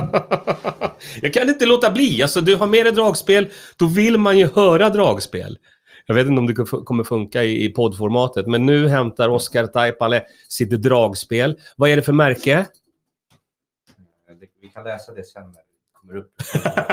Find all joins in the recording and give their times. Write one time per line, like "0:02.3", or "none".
none